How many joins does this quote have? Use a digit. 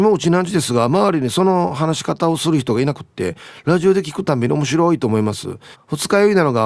1